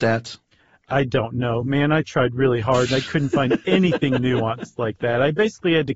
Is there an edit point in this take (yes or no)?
no